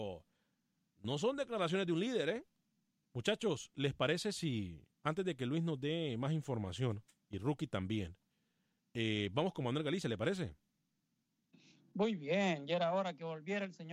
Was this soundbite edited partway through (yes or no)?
yes